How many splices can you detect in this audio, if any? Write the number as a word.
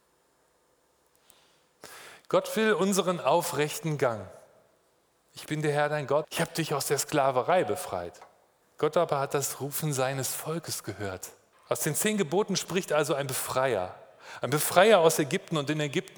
three